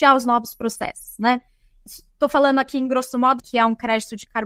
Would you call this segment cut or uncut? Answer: cut